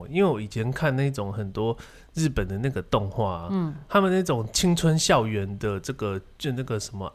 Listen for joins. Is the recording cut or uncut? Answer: uncut